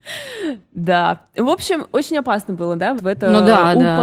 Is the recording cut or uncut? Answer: cut